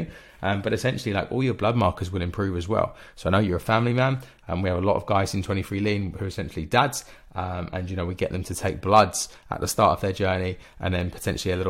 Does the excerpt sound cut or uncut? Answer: uncut